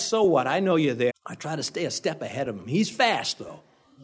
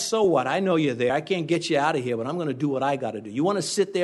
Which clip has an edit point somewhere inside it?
first; 1 cut; at 1.1 s

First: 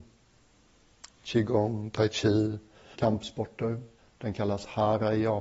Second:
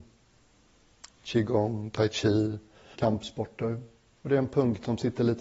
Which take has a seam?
first; 1 cut; at 4.0 s

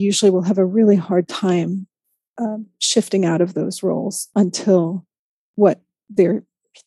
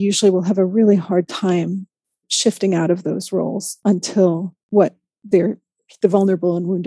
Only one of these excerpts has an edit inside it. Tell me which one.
second; 2 cuts; at 2.2 s, 4.6 s

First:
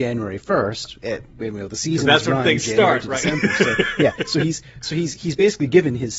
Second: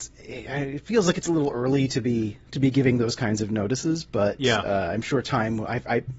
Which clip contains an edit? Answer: second; 1 cut; at 2.5 s

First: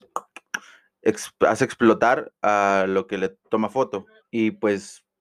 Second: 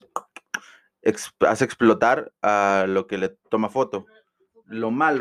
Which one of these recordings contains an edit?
first; 1 cut; at 4.2 s

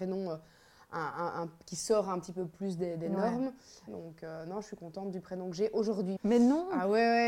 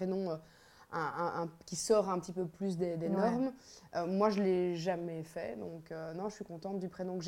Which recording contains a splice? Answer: first; 2 cuts; at 3.9 s, 6.2 s

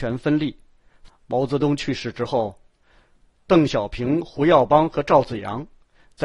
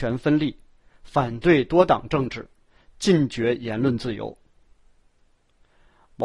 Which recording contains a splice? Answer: first; 1 cut; at 1.1 s

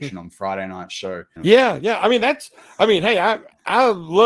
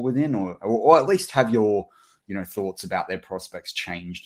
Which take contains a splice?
first; 1 cut; at 1.4 s

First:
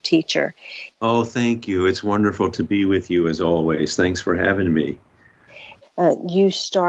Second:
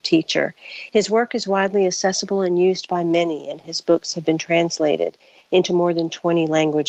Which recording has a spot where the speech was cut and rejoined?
first; 2 cuts; at 0.9 s, 5.8 s

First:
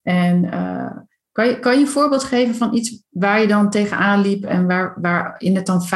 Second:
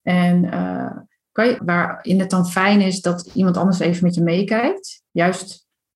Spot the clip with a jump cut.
second; 1 cut; at 1.6 s

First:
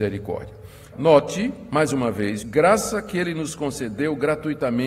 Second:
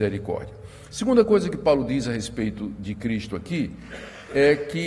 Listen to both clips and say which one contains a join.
first; 2 cuts; at 0.9 s, 2.4 s

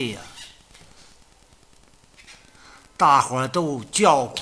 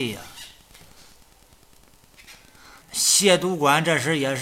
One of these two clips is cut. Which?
second; 1 cut; at 2.8 s

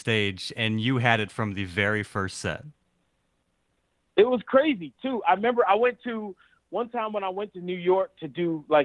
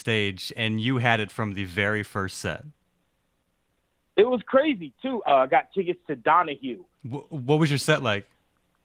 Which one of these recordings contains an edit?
second; 2 cuts; at 5.2 s, 6.9 s

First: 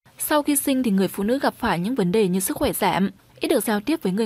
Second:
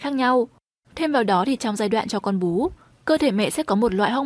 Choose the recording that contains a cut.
first; 1 cut; at 3.3 s

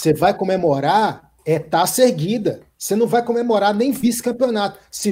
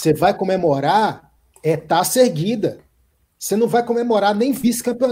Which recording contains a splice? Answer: first; 2 cuts; at 1.4 s, 2.7 s

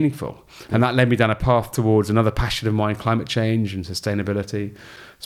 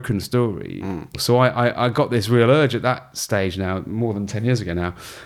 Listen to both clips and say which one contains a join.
second; 1 cut; at 1.1 s

